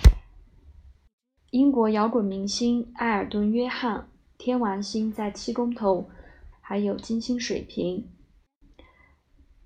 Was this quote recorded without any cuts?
no; 1 cut; at 6.5 s

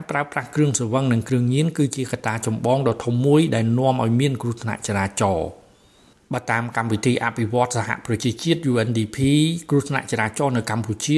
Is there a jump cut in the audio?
no; 0 cuts

